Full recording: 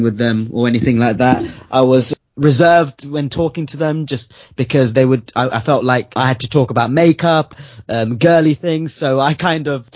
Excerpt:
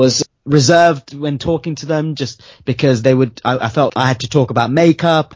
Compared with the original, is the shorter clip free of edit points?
no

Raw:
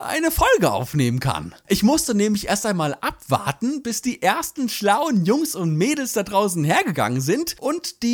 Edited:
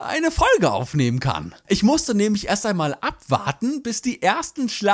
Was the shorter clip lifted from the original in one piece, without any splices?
yes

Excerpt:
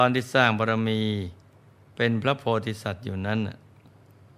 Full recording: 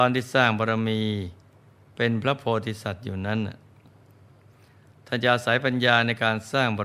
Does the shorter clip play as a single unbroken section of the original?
yes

